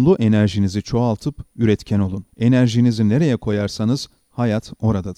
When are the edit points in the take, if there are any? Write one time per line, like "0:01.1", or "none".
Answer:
0:02.3